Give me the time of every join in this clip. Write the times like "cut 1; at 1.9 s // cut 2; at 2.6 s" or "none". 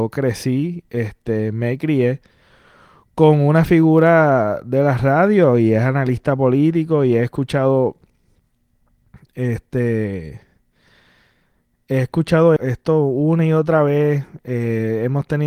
cut 1; at 12.6 s